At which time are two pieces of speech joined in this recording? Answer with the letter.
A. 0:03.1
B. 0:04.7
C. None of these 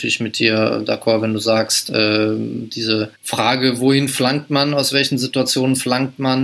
A